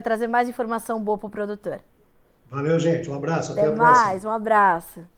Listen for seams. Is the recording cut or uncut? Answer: uncut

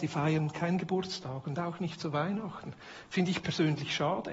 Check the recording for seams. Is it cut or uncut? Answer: uncut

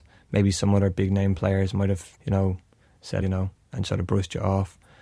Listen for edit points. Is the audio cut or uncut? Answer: cut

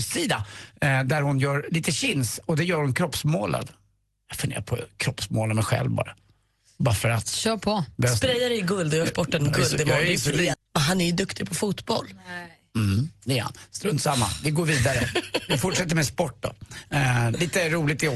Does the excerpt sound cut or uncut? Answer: cut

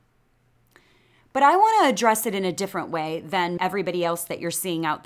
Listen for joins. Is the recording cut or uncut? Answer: cut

